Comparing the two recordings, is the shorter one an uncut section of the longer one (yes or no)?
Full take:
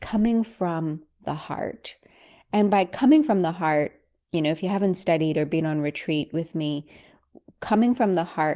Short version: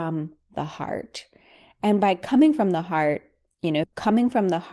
no